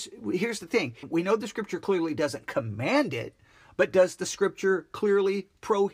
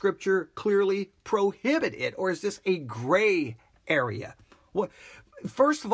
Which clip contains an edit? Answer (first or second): first